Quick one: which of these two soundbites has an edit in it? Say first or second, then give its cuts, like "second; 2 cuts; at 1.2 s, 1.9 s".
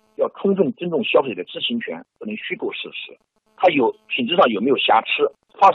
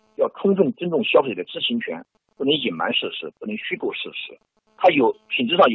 first; 1 cut; at 2.1 s